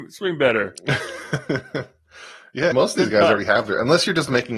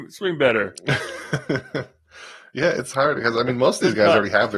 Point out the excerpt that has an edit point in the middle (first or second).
first